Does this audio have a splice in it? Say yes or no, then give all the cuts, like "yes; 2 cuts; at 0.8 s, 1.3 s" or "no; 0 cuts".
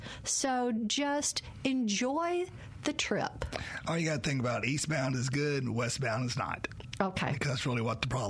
no; 0 cuts